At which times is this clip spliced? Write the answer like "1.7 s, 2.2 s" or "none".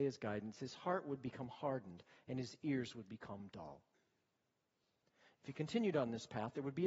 none